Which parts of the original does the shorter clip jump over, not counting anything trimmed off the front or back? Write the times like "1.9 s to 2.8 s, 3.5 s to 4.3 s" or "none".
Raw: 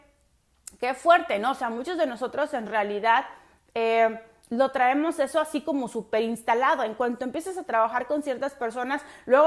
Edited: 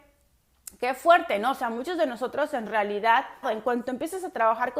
3.4 s to 6.8 s